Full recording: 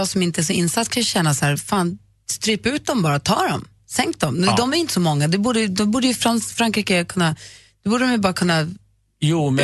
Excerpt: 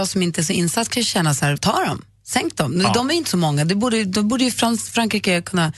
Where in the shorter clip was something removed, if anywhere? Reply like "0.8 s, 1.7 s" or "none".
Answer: 1.6 s